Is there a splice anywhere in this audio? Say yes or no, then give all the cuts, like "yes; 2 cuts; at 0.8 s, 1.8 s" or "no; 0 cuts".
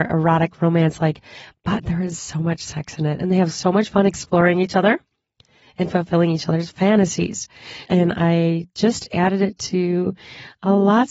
yes; 1 cut; at 7.9 s